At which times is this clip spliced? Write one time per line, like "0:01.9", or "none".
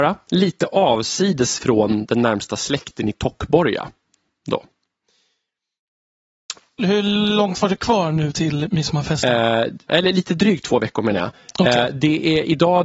0:06.8
0:09.9